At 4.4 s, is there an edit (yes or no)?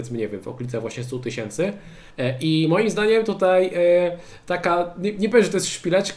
no